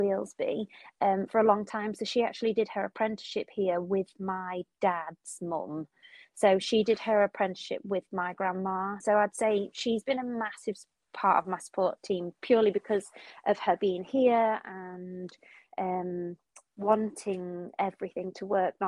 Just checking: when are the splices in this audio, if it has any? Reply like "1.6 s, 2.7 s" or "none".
9.0 s